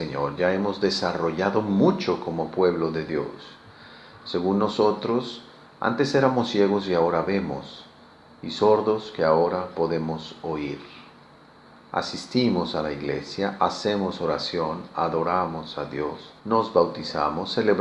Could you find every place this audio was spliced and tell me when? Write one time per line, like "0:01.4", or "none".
0:16.4